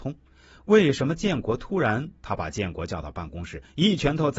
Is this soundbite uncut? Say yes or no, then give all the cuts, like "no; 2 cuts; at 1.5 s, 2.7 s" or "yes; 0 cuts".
no; 1 cut; at 2.2 s